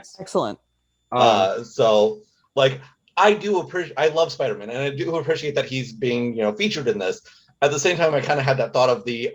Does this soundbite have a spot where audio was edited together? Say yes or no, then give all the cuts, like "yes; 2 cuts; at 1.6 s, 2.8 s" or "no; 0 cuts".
no; 0 cuts